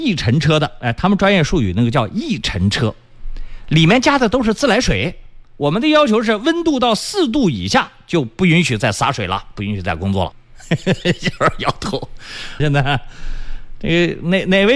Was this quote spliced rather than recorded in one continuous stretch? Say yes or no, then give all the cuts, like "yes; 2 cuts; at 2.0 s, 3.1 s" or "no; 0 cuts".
yes; 2 cuts; at 10.3 s, 12.6 s